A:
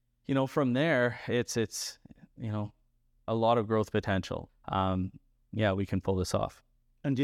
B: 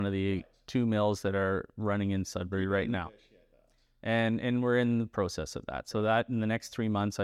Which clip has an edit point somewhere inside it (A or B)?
A